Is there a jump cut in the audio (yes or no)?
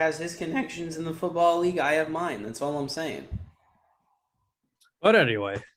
no